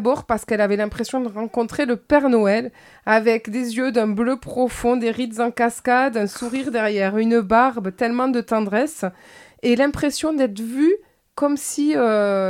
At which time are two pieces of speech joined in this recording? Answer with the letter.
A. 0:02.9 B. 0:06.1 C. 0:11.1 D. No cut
D